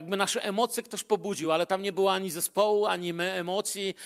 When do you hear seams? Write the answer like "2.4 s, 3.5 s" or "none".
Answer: none